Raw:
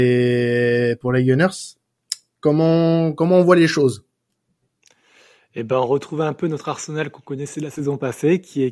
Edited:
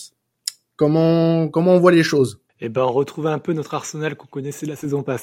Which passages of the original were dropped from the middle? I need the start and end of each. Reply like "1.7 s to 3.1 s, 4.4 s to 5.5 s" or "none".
4.1 s to 5.4 s